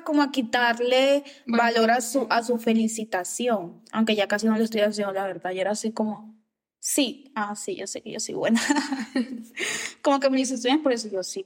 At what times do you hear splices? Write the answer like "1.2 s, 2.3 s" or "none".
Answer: none